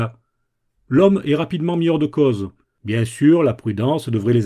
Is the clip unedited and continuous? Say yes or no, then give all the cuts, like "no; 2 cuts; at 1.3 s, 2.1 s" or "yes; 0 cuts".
no; 1 cut; at 2.6 s